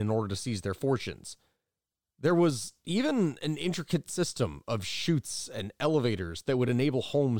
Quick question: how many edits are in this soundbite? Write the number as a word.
one